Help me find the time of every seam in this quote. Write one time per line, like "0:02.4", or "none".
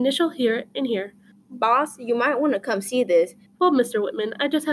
0:01.3
0:03.5